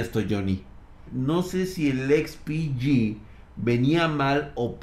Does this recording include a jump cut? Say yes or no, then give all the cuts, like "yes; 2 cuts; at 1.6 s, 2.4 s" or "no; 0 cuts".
yes; 1 cut; at 1.1 s